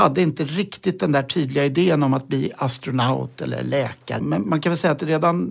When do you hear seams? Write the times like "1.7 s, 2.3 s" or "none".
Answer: 4.2 s